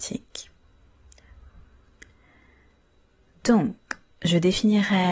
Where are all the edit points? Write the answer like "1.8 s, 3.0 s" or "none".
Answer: none